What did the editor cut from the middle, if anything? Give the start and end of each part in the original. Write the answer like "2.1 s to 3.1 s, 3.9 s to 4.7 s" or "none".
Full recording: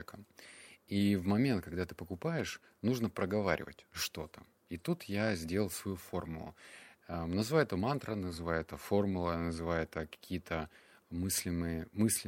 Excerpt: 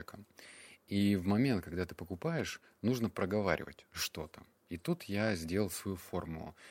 none